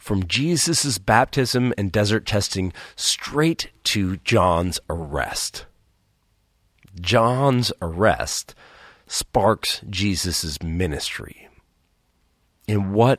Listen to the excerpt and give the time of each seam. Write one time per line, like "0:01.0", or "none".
none